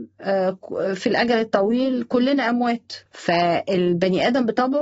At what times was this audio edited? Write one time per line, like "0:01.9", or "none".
0:03.1